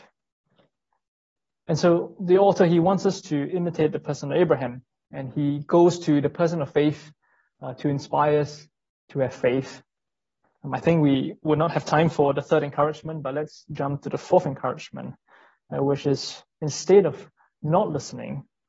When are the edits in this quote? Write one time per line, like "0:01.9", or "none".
0:10.4